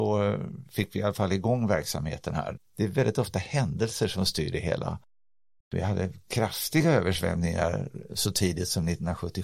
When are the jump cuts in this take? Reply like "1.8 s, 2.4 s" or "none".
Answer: 2.6 s, 5.6 s